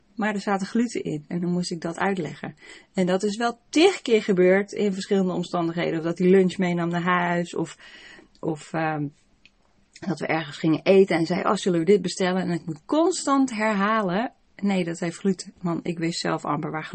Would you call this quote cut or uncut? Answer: uncut